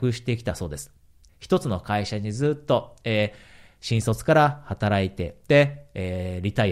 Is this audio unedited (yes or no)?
no